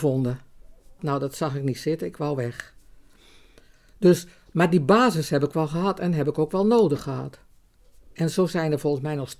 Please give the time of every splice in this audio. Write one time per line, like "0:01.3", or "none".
0:01.0